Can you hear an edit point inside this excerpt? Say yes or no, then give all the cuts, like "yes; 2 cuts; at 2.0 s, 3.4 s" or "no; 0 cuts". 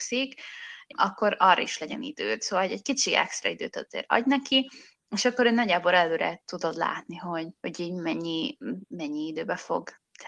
no; 0 cuts